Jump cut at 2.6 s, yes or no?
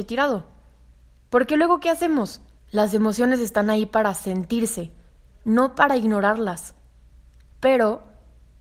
yes